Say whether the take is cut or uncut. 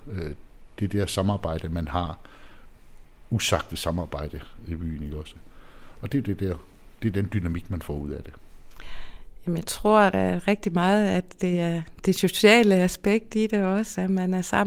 uncut